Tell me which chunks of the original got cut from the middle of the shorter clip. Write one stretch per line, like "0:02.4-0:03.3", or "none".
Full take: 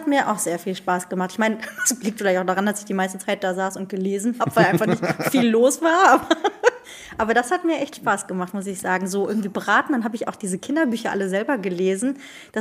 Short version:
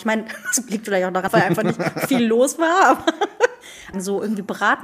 0:02.6-0:04.5
0:07.2-0:09.0